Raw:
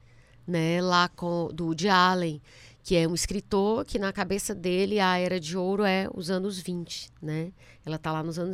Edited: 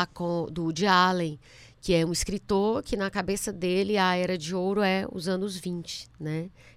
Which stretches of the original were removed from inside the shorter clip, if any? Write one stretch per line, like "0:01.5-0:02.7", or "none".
none